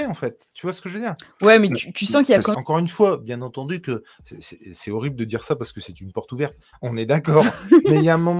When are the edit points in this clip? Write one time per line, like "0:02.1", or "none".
0:02.5
0:06.7